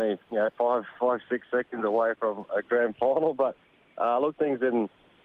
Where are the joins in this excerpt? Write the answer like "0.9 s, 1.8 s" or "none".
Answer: 4.4 s